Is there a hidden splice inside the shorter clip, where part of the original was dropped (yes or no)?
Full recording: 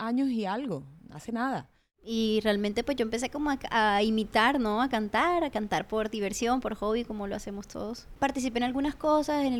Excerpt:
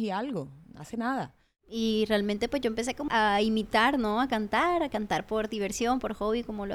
yes